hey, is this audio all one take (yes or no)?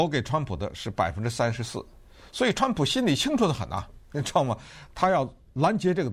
yes